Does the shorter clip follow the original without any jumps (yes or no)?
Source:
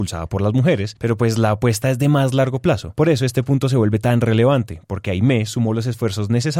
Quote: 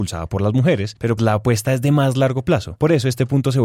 no